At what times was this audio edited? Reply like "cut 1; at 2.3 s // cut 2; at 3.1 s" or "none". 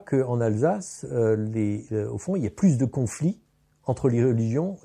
none